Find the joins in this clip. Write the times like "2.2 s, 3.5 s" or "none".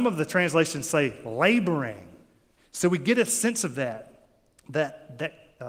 2.6 s